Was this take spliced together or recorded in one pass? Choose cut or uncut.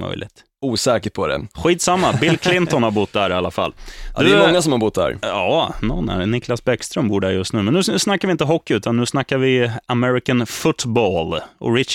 uncut